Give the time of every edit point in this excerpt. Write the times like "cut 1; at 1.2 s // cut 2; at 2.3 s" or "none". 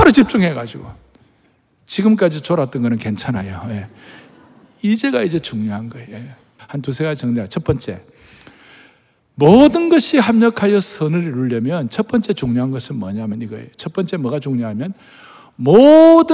cut 1; at 6.6 s

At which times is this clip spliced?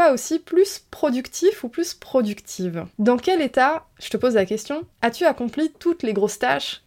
cut 1; at 2.9 s // cut 2; at 4.9 s

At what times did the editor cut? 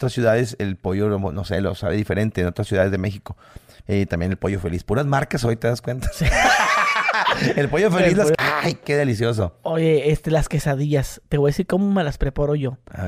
cut 1; at 8.3 s

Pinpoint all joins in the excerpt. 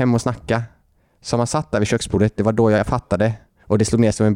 none

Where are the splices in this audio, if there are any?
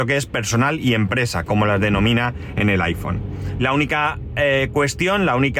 cut 1; at 3.6 s

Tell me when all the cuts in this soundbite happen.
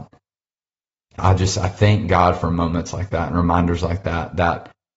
cut 1; at 1.2 s

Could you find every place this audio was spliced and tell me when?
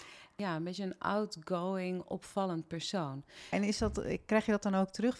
cut 1; at 3.5 s

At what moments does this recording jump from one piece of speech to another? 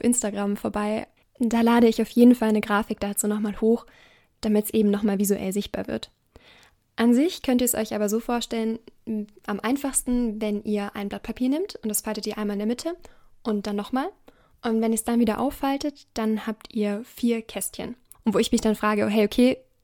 cut 1; at 18.1 s

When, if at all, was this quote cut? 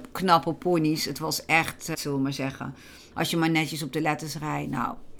cut 1; at 1.9 s // cut 2; at 3.1 s

